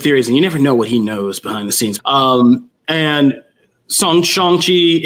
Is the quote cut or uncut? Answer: cut